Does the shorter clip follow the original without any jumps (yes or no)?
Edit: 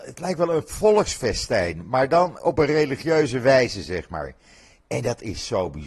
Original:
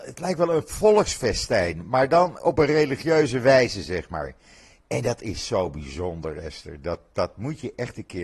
yes